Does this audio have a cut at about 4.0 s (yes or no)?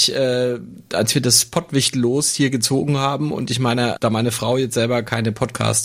yes